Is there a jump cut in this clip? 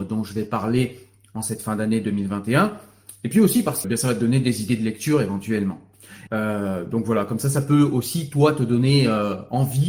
yes; 2 cuts; at 3.8 s, 6.3 s

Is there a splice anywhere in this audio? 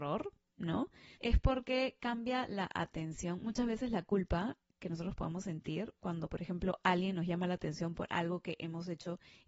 yes; 1 cut; at 1.2 s

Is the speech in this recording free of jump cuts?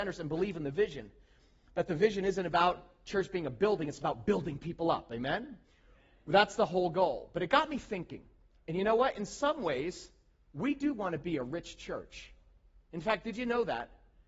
yes; 0 cuts

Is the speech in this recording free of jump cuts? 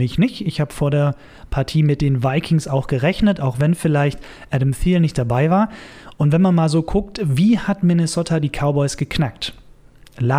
yes; 0 cuts

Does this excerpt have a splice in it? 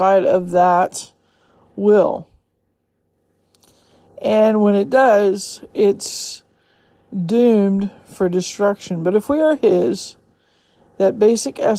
yes; 1 cut; at 5.7 s

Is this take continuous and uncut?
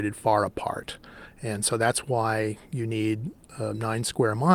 yes; 0 cuts

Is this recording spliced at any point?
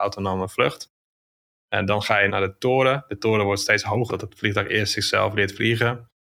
yes; 2 cuts; at 2.3 s, 4.1 s

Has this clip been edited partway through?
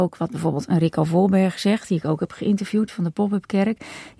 no; 0 cuts

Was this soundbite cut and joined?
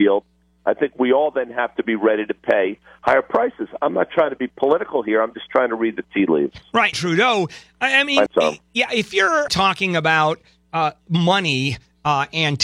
yes; 3 cuts; at 6.9 s, 8.3 s, 9.5 s

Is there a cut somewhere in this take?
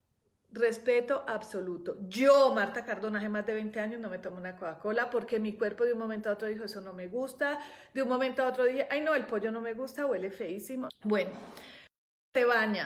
yes; 1 cut; at 10.9 s

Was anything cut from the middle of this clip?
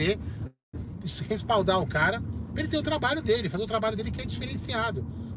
no; 0 cuts

